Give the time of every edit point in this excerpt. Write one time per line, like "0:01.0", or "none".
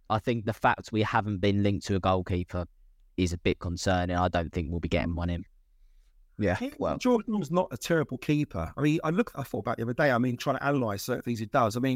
none